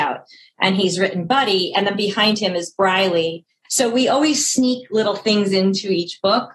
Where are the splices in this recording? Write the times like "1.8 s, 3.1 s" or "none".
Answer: 3.6 s